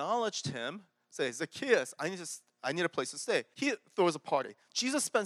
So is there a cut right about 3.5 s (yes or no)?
yes